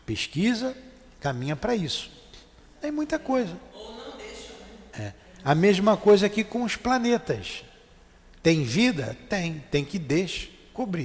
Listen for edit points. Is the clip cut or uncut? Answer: uncut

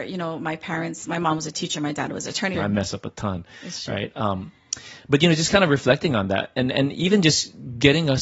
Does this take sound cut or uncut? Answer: cut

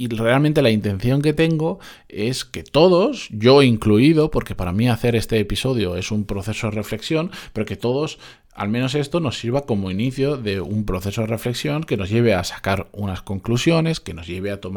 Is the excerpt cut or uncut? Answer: uncut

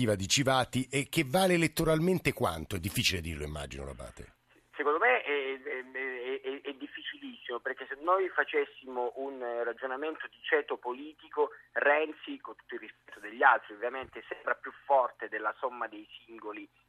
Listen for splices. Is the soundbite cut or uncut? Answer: uncut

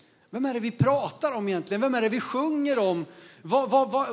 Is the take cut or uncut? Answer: uncut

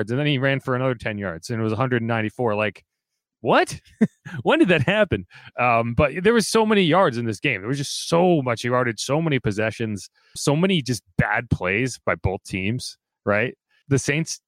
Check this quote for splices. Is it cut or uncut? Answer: uncut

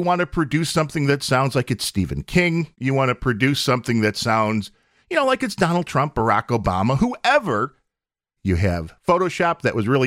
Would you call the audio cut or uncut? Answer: cut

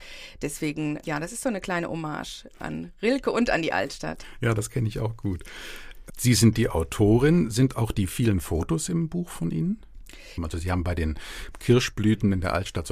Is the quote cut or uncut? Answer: cut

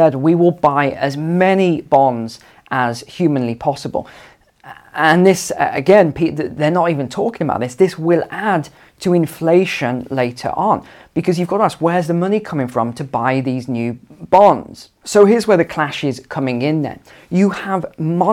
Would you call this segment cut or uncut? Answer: uncut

